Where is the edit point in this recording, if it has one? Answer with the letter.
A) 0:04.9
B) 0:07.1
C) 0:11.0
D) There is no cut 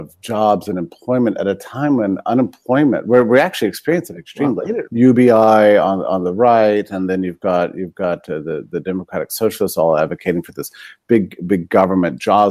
A